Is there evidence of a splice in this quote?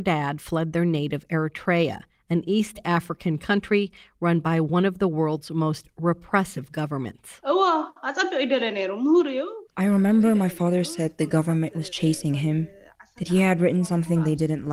no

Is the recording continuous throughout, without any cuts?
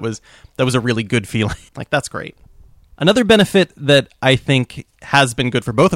no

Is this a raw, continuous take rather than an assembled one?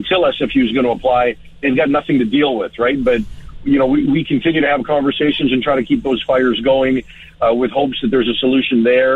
yes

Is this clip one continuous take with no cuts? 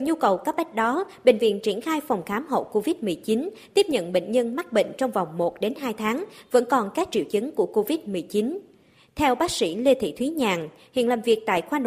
yes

